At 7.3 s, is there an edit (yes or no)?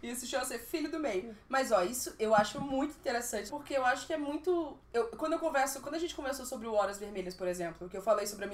no